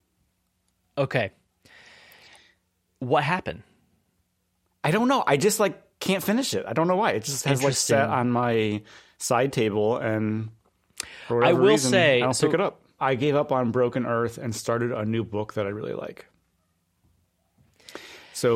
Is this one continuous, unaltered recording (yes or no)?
no